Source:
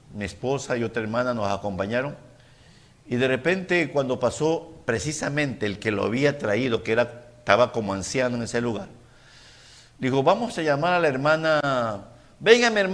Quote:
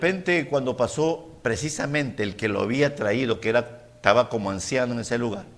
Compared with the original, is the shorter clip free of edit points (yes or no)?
yes